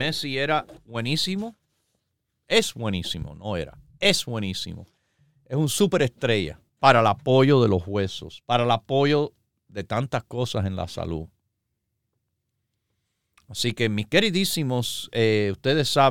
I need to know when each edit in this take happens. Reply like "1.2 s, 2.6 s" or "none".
6.7 s